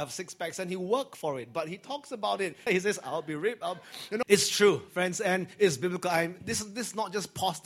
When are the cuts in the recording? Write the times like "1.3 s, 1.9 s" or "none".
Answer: 2.7 s, 4.2 s